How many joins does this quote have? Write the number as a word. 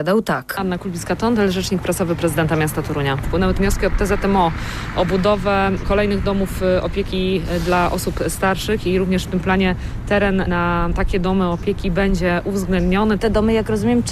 zero